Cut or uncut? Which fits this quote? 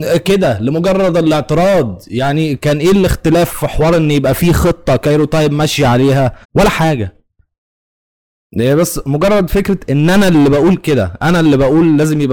cut